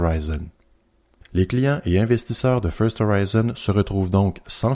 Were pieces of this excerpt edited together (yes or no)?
yes